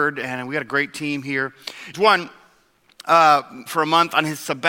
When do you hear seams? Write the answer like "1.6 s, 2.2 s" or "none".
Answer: 1.9 s, 3.7 s